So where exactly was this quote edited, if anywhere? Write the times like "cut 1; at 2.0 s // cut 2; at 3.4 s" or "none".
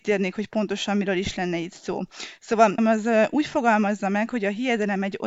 cut 1; at 2.8 s